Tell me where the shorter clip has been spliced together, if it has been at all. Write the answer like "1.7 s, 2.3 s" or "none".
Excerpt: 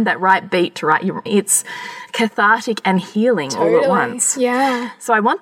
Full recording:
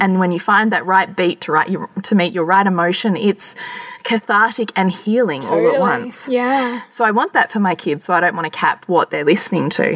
1.3 s